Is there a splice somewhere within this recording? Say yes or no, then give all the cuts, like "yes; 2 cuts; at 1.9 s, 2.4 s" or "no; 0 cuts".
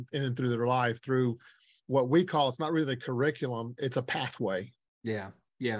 no; 0 cuts